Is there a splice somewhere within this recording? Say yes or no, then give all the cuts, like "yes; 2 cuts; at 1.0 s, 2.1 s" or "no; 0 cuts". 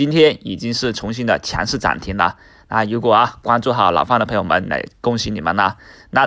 no; 0 cuts